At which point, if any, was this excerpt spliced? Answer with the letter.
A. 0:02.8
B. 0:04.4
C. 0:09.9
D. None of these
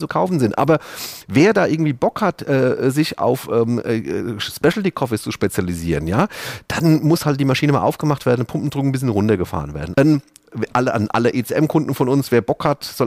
C